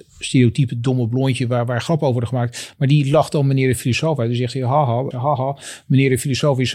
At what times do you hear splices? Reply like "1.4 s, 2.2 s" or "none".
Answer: 5.1 s

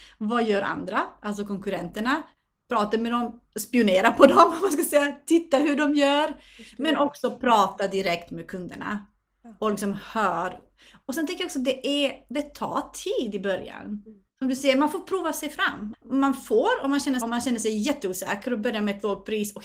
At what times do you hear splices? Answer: 15.9 s, 17.2 s

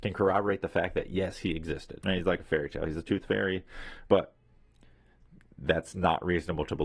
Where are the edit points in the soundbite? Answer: 2.0 s, 4.1 s

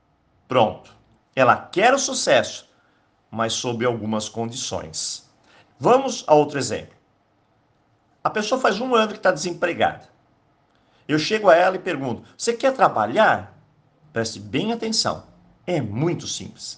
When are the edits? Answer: 1.2 s, 5.6 s, 14.0 s

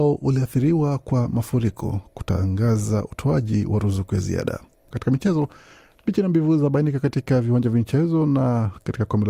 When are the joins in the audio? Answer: 4.9 s

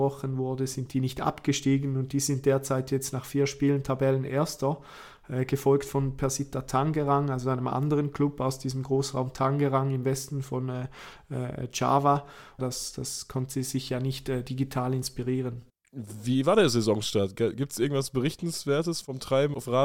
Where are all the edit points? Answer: 12.6 s, 15.7 s

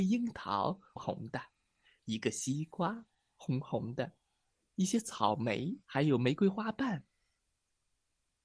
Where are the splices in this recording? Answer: 1.0 s, 5.8 s

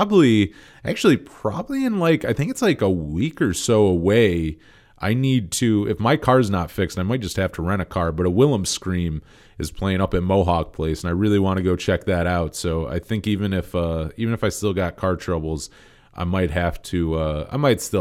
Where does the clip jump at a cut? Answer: none

